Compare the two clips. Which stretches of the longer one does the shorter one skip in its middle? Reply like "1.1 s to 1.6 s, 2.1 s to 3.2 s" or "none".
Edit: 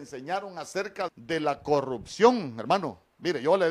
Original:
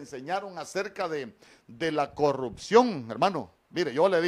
1.1 s to 1.6 s